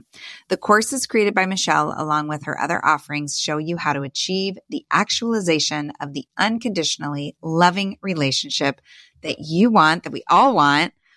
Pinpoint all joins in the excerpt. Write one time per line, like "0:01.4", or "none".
none